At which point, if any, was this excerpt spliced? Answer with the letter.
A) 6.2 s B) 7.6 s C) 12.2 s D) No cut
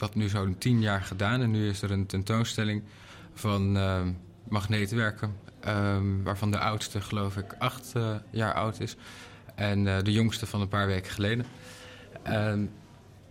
D